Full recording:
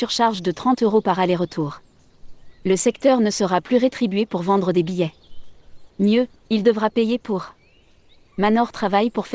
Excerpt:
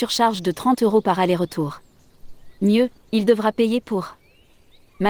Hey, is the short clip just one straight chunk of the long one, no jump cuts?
no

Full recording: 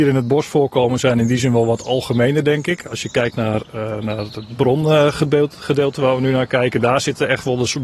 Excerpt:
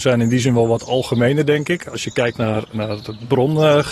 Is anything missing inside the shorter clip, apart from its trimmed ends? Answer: yes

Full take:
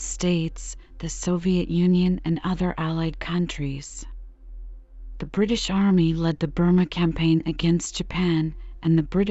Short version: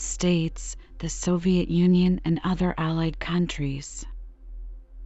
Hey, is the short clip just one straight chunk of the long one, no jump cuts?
yes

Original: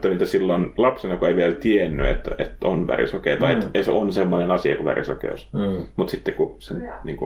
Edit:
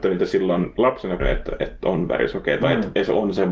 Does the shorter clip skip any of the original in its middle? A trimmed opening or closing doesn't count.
yes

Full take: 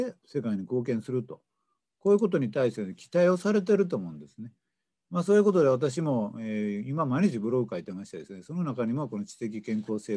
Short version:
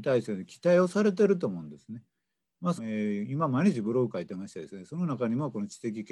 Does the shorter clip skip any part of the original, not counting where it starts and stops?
yes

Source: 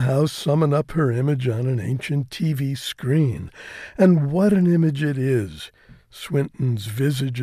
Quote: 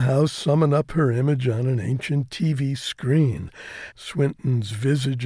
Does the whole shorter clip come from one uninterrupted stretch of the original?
no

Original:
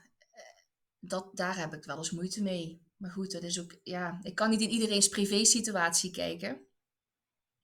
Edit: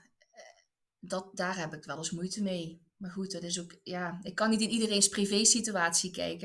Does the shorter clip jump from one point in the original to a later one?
no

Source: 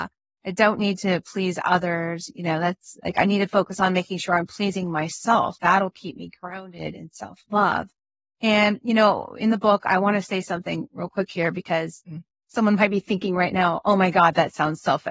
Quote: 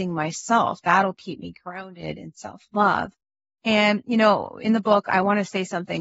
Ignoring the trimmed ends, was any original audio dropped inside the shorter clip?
no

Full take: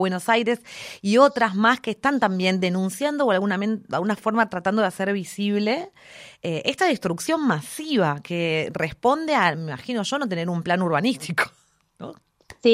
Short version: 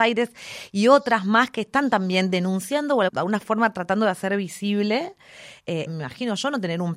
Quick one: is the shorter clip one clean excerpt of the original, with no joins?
no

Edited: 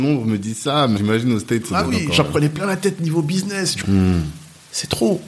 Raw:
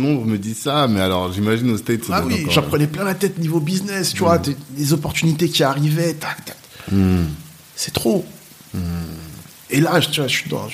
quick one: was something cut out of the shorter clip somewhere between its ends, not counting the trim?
yes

